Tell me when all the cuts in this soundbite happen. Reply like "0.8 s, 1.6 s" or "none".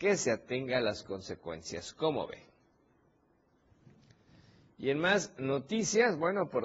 none